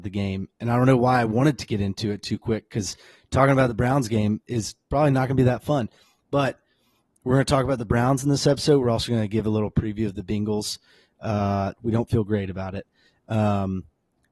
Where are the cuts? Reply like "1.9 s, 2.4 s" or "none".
11.8 s